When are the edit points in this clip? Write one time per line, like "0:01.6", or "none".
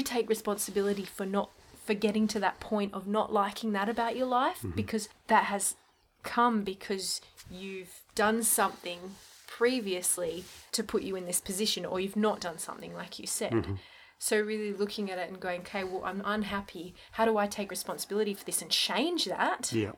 none

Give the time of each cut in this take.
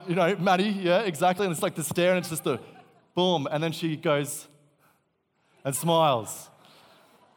none

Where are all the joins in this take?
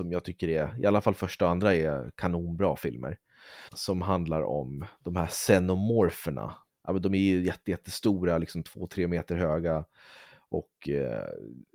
0:03.7
0:06.7

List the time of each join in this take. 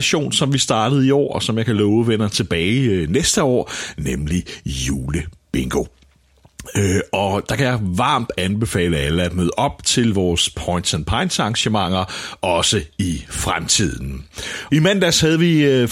0:14.7

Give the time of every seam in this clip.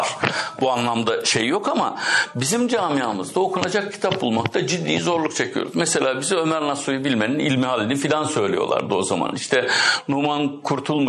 none

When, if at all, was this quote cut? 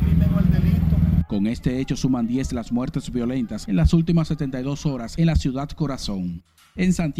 none

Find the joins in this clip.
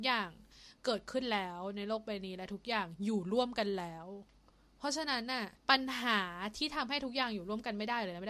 0:05.6

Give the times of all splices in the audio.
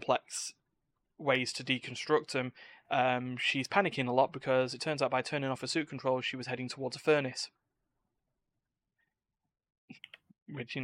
0:02.8

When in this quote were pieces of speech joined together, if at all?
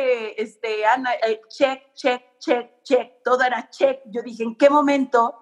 0:01.2

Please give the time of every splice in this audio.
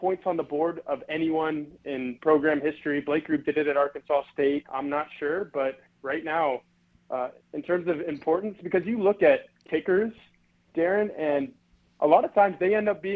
0:04.6

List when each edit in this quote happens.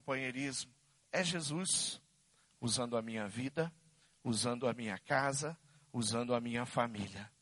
0:01.0

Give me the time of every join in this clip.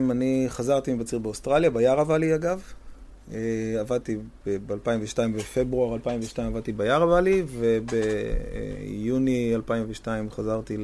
none

